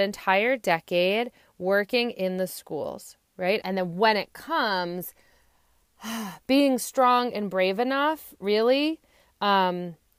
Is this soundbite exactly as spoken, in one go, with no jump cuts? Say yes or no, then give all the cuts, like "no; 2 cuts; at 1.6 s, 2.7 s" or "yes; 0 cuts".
no; 1 cut; at 3.6 s